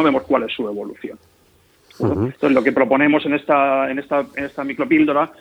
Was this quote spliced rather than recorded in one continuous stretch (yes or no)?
no